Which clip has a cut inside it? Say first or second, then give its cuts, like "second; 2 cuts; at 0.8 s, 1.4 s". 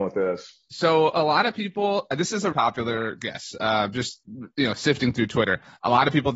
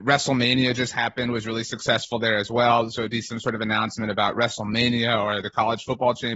first; 1 cut; at 2.5 s